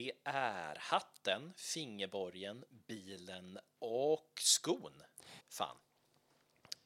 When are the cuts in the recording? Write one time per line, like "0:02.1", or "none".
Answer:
0:05.4

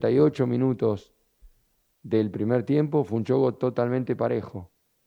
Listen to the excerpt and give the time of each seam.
none

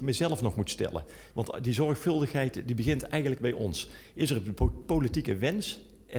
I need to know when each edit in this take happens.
0:01.3

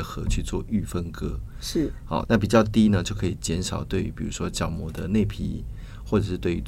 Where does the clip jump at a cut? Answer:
0:02.2

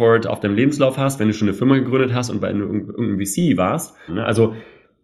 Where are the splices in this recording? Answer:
0:04.1

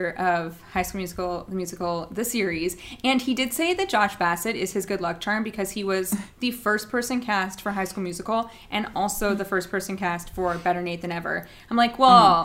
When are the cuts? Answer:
none

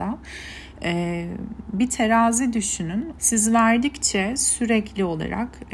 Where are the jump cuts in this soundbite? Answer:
0:03.1

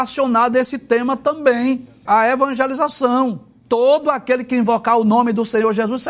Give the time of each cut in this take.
0:02.1

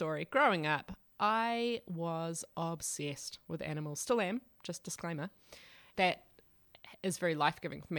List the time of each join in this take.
0:05.9

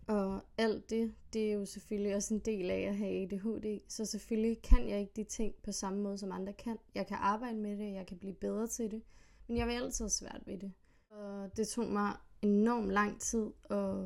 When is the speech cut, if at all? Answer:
none

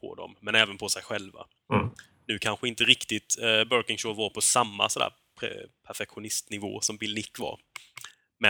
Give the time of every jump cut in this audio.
none

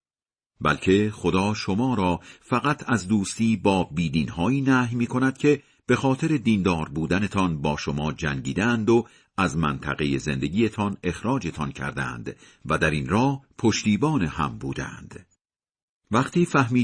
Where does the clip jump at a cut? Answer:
0:15.9

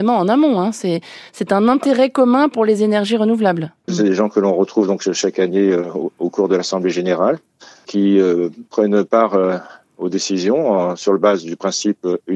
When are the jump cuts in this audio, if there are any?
0:03.9

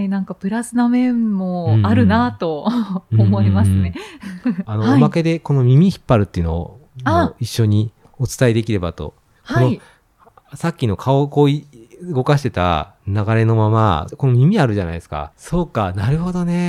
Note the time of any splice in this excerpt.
0:04.6
0:14.1
0:15.3

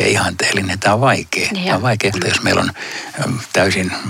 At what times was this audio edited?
0:02.1

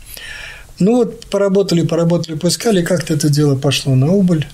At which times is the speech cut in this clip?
none

